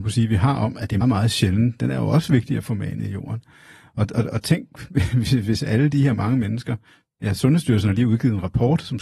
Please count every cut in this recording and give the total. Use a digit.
1